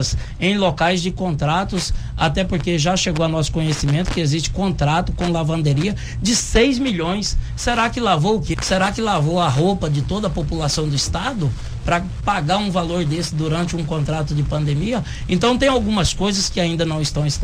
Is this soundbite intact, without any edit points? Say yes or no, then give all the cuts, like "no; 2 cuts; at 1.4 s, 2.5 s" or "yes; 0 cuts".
no; 1 cut; at 8.5 s